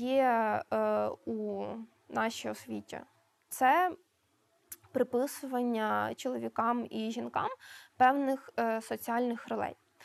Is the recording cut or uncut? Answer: uncut